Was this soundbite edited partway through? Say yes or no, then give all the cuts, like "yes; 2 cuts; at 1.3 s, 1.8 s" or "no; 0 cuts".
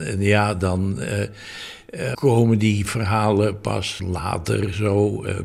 yes; 2 cuts; at 2.1 s, 4.0 s